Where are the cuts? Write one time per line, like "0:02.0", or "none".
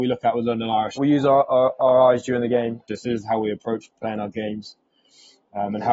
0:01.0
0:02.9

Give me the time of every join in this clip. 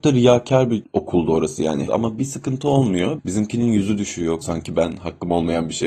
0:01.9
0:03.2
0:04.4

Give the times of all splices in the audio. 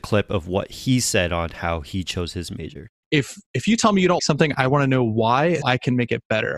0:03.0
0:04.2
0:05.6

